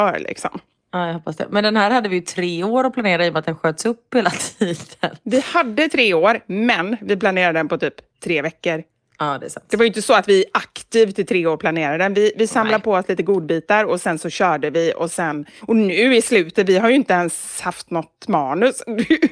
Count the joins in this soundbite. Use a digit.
0